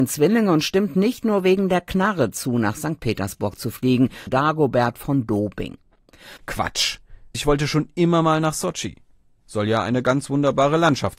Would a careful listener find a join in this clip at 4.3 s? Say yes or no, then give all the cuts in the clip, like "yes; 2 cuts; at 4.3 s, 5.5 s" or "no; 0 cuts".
yes; 2 cuts; at 4.3 s, 6.4 s